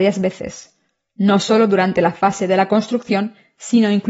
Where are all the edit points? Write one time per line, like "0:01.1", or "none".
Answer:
none